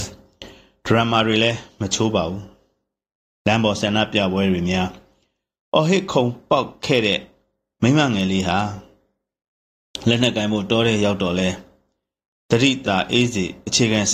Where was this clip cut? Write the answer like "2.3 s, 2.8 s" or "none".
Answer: 12.8 s